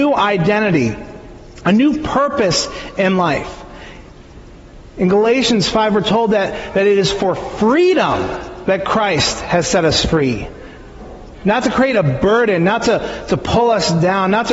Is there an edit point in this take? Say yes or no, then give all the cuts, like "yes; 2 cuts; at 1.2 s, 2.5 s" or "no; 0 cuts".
no; 0 cuts